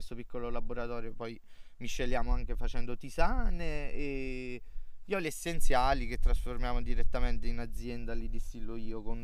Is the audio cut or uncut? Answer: uncut